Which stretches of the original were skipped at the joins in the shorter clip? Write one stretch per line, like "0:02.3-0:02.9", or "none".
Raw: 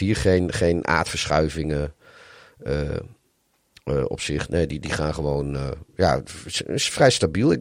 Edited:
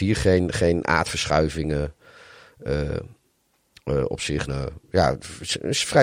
0:04.5-0:05.5